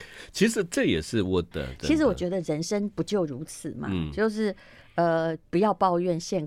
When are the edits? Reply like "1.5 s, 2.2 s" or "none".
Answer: 1.5 s